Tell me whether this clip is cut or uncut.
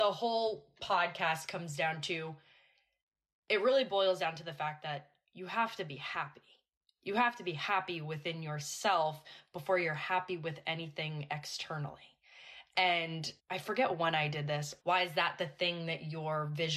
cut